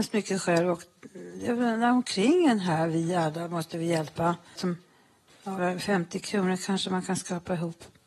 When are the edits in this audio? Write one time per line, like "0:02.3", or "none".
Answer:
0:04.6
0:05.6